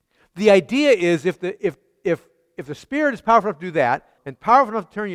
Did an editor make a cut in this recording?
yes; 1 cut; at 4.2 s

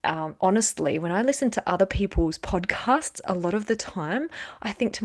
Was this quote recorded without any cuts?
yes; 0 cuts

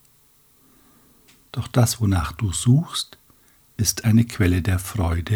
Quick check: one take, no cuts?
no; 1 cut; at 1.5 s

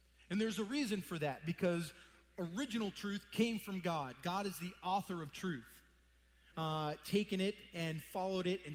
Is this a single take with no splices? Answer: no; 1 cut; at 6.5 s

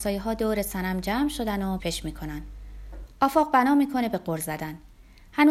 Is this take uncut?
no; 1 cut; at 1.8 s

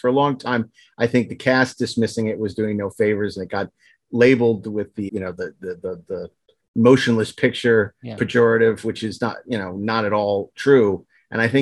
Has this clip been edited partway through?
yes; 1 cut; at 5.1 s

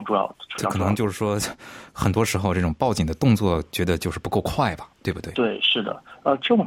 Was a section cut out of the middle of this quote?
yes; 1 cut; at 4.9 s

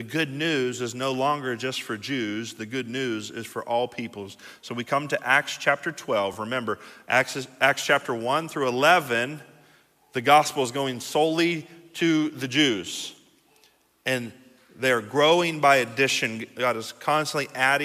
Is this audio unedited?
yes; 0 cuts

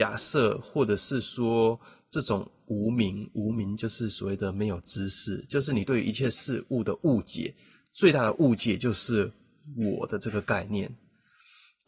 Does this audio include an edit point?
no; 0 cuts

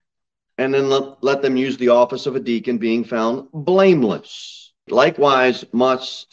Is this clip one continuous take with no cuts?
no; 1 cut; at 4.9 s

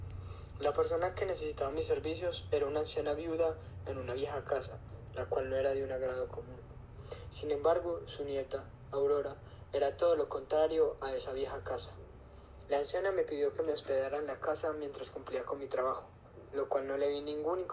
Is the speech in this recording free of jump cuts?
no; 1 cut; at 12.7 s

